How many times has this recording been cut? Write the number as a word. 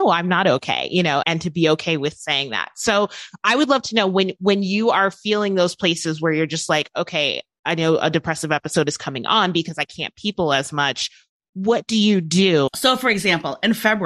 two